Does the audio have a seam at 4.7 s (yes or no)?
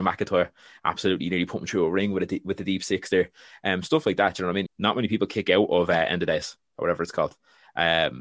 yes